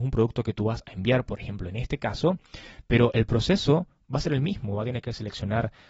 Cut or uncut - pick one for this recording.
uncut